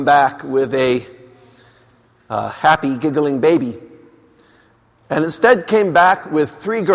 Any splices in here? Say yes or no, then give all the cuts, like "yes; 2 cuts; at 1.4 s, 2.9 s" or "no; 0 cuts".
no; 0 cuts